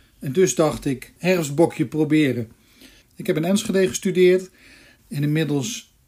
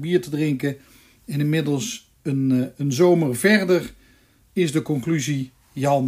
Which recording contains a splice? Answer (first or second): first